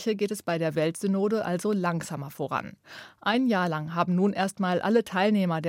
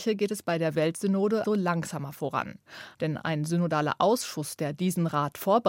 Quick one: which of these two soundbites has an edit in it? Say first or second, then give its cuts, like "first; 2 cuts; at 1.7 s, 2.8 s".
second; 2 cuts; at 1.4 s, 2.9 s